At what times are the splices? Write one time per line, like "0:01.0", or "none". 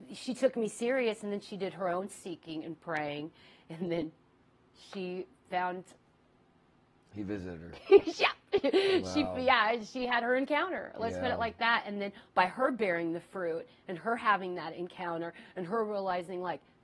none